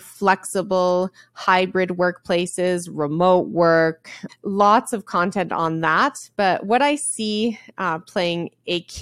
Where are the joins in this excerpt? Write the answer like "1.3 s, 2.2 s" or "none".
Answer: 4.3 s